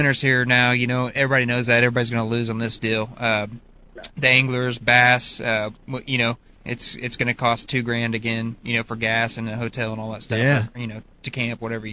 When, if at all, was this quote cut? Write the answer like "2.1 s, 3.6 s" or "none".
6.6 s